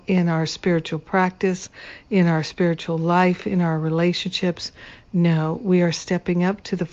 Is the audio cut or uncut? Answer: uncut